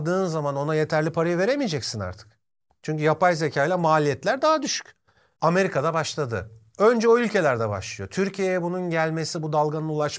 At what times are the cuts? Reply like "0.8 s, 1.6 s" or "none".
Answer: 5.4 s